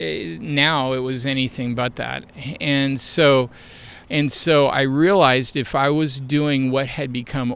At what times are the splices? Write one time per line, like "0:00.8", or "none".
0:04.0